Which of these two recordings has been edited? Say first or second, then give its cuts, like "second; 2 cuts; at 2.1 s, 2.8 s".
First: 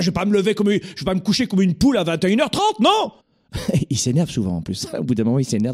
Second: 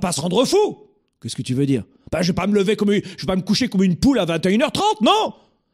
first; 1 cut; at 3.2 s